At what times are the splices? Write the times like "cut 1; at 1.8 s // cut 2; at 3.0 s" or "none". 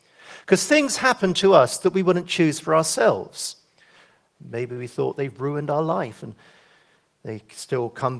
cut 1; at 4.4 s